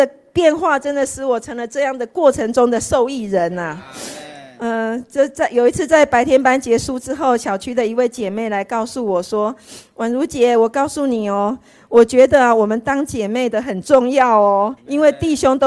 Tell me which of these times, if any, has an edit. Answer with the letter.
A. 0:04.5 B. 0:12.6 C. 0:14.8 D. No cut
C